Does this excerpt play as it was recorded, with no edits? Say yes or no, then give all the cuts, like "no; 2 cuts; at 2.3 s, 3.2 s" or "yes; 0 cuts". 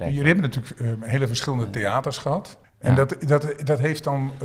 no; 1 cut; at 2.6 s